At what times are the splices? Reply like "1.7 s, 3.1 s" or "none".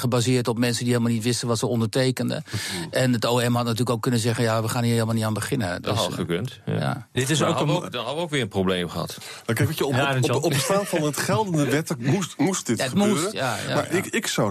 none